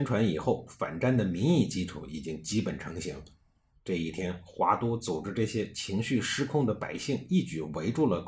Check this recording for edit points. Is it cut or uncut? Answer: uncut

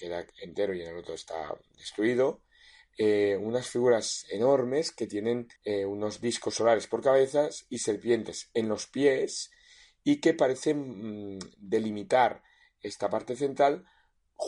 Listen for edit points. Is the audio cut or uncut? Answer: cut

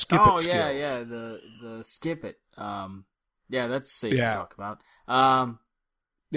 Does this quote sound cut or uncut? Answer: uncut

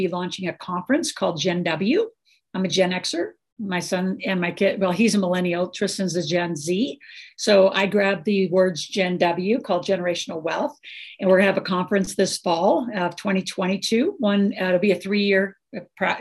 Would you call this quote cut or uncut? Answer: uncut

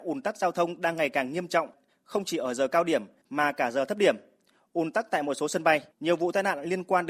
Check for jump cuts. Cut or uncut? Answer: cut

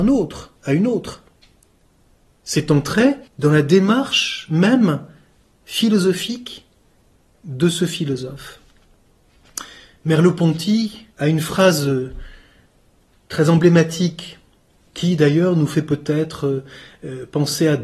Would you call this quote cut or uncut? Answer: cut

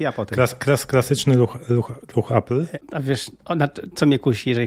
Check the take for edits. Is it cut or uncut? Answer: cut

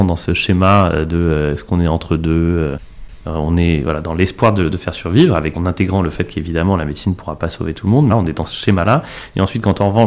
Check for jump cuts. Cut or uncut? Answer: cut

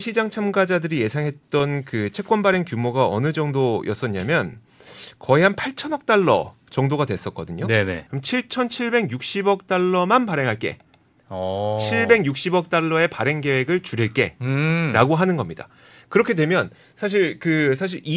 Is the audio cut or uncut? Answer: cut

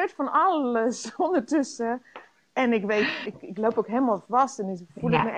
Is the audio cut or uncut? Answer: cut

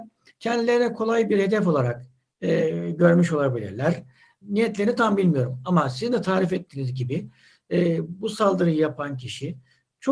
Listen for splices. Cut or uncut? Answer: cut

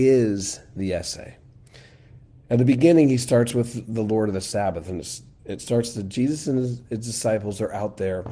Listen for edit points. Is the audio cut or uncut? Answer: uncut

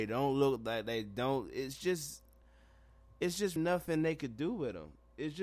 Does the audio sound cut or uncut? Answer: cut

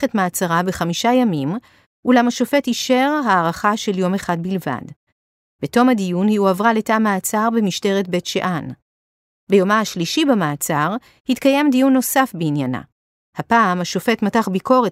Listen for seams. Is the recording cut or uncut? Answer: uncut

